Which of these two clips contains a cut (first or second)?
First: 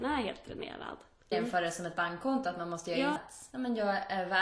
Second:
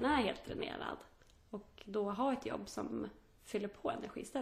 first